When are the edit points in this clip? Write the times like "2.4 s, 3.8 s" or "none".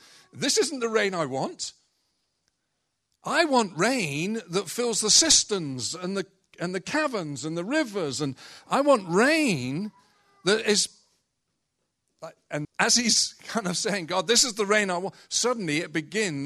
12.6 s